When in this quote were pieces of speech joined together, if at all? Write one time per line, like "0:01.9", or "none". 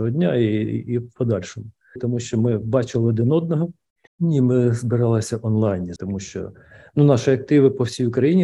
0:02.0
0:04.1
0:06.0

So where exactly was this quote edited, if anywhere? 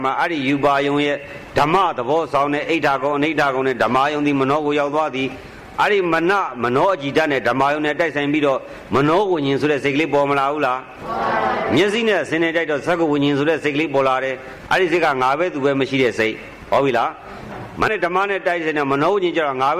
0:17.9

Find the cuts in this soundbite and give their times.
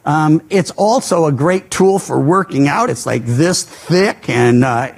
none

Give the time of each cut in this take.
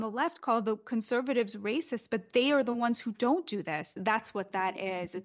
0:04.0

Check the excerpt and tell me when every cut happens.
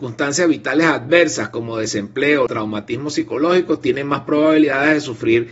0:02.5

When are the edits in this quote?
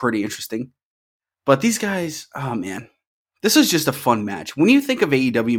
none

